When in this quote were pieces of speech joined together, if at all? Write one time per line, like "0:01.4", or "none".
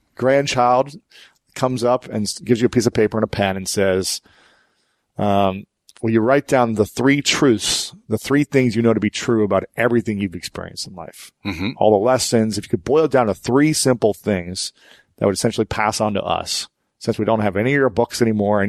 none